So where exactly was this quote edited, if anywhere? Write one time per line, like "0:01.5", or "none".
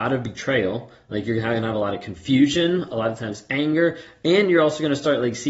none